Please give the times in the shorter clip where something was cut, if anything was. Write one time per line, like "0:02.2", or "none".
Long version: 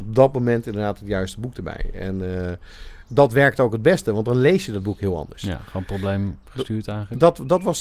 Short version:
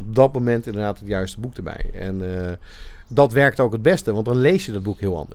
none